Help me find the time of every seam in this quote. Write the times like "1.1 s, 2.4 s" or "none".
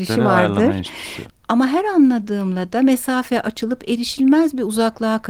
1.3 s